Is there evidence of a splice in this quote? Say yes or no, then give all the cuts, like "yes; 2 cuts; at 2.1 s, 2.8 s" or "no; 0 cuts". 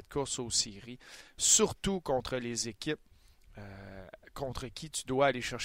no; 0 cuts